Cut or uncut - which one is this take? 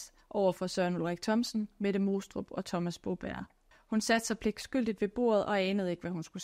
cut